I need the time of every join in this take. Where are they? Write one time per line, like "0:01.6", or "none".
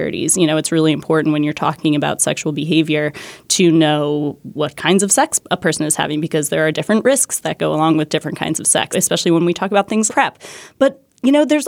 0:08.9
0:10.1